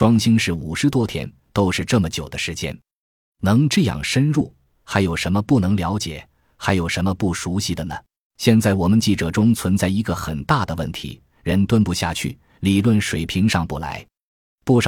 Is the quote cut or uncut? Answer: cut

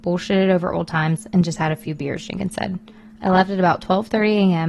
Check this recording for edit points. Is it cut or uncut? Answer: uncut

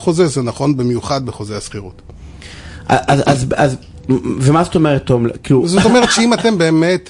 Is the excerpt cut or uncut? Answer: uncut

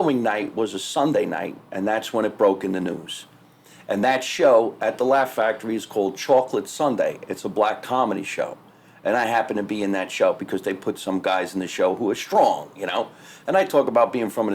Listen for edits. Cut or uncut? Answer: uncut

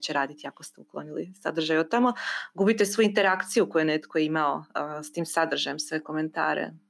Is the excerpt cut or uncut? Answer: uncut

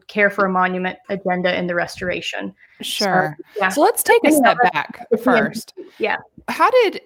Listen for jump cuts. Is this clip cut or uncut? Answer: cut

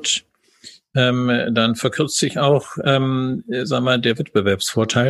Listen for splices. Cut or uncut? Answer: uncut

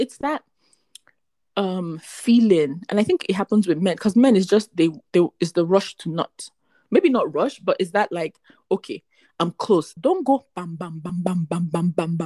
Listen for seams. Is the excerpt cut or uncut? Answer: cut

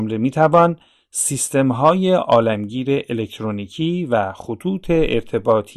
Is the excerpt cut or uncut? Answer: uncut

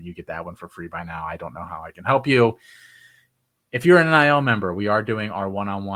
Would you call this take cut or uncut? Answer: uncut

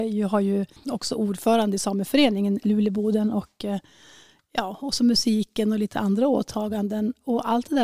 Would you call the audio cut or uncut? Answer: uncut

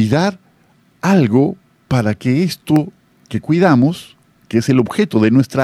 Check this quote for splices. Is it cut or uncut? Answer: uncut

